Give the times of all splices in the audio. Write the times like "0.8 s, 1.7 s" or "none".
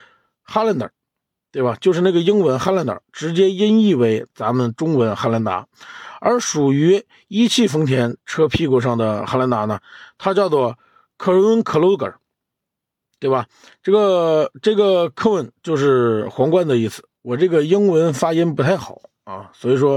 none